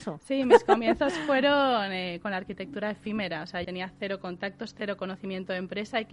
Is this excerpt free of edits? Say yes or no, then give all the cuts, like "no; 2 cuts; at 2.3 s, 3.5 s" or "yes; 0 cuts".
no; 1 cut; at 3.6 s